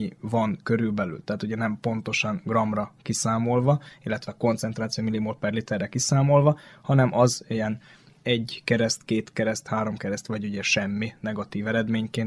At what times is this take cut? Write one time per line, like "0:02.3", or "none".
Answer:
0:10.2